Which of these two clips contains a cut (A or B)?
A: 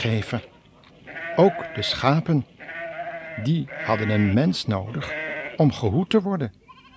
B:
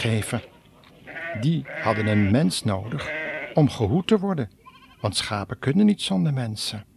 B